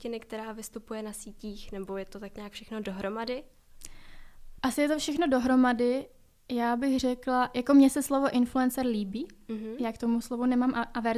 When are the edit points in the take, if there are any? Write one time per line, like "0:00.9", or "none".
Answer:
none